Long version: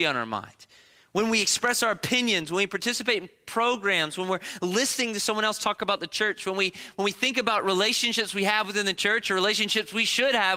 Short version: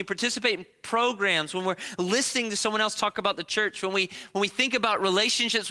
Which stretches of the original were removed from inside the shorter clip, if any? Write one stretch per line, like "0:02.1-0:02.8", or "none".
none